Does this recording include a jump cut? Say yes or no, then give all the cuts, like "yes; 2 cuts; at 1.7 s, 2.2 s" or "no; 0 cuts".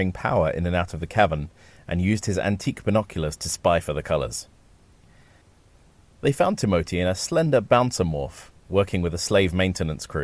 no; 0 cuts